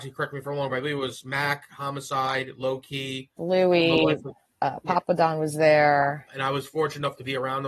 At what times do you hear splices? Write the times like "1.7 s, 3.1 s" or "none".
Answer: 3.4 s, 6.3 s